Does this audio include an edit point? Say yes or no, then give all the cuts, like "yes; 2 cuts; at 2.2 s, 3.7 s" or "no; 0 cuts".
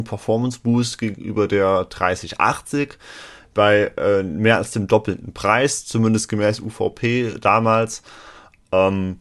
no; 0 cuts